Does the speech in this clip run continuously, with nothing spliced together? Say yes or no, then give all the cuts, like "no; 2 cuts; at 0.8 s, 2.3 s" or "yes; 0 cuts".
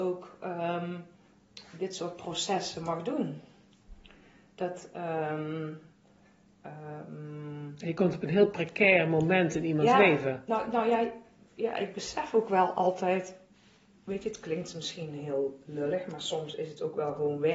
yes; 0 cuts